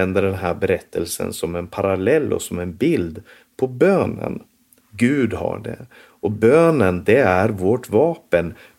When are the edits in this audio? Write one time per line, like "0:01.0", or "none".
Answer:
0:04.8